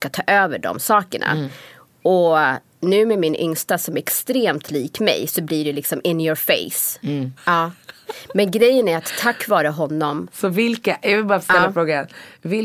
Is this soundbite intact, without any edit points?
no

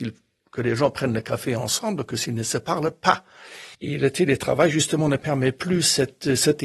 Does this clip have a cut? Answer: yes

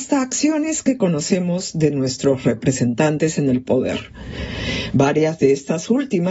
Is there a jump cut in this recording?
no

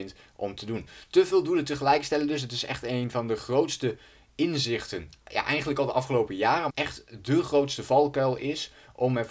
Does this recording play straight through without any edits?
no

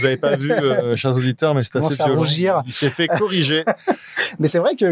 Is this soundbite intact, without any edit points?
yes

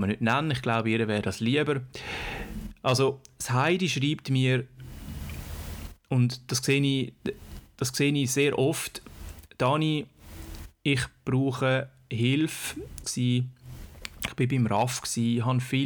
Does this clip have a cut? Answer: yes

